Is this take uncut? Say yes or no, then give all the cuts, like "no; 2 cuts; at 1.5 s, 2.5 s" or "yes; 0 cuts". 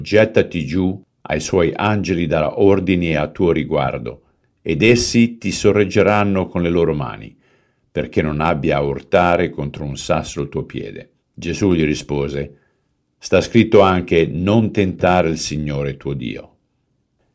no; 2 cuts; at 1.1 s, 11.2 s